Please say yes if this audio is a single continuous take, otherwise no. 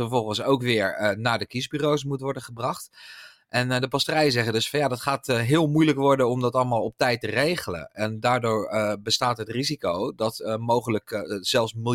yes